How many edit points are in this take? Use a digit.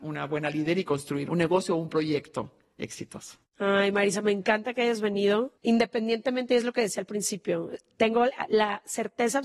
1